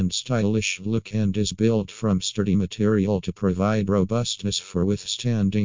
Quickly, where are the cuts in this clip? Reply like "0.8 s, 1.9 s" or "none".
none